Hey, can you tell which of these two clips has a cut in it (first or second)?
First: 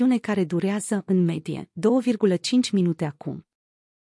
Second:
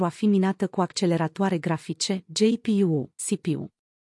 second